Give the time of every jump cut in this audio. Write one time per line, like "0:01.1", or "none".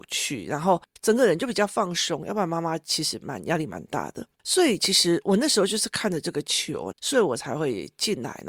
0:04.4
0:06.9

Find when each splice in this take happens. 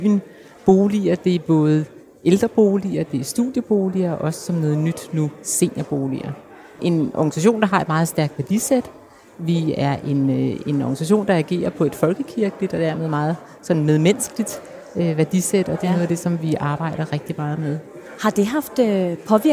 0:06.8

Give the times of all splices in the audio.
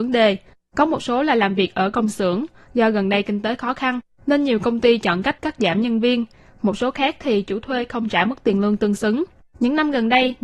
0:09.5

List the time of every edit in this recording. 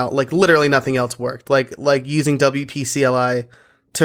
none

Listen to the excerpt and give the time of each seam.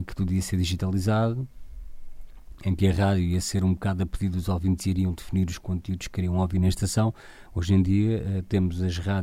0:07.5

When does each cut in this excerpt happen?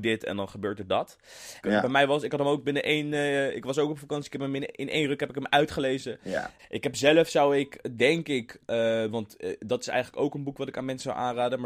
0:01.6
0:06.6

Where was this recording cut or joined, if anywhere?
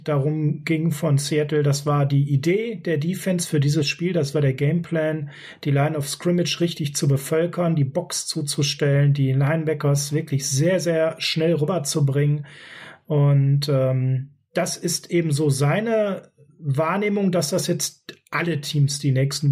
none

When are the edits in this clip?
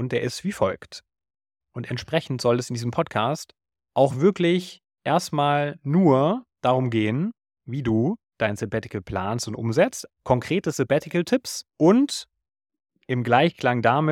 0:01.6
0:10.1
0:11.7

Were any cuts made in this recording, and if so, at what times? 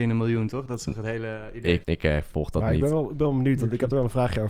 0:01.8

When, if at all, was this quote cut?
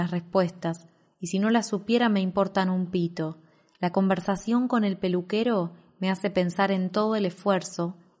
none

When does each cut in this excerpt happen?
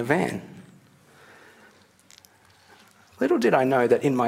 none

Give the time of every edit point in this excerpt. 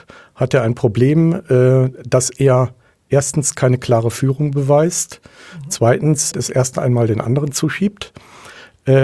0:06.3

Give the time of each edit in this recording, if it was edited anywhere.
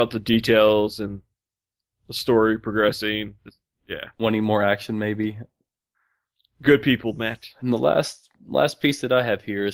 0:03.4

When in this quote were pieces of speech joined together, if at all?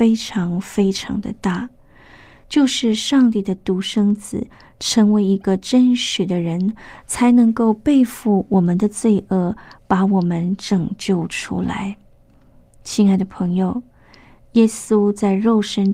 none

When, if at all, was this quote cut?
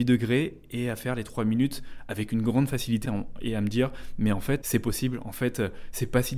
0:03.0
0:04.6

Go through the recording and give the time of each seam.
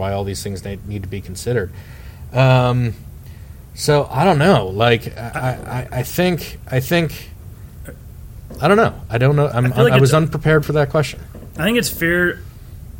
none

